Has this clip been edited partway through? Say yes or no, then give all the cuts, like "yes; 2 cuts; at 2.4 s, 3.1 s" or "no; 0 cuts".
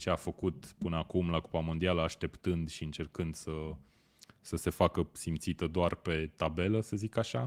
no; 0 cuts